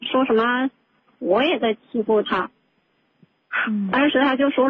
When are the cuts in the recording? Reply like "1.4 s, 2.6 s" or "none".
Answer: 1.2 s